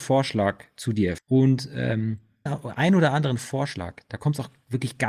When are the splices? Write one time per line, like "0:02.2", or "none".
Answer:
0:01.2
0:02.5